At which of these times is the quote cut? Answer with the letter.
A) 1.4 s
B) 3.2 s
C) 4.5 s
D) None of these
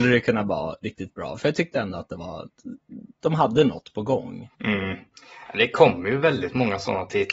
C